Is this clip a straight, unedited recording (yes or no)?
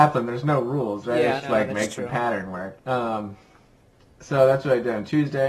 no